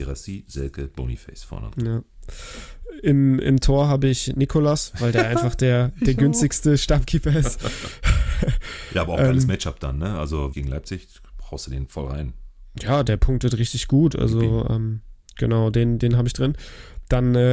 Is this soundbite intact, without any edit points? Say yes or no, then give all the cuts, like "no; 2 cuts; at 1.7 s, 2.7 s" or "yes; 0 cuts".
no; 1 cut; at 10.5 s